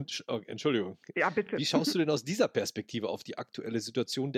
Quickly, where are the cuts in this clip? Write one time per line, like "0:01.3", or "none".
none